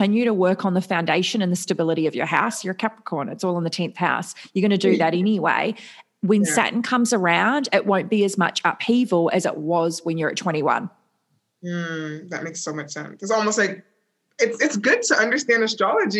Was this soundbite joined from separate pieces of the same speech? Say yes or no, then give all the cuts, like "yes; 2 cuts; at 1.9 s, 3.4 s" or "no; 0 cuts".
no; 0 cuts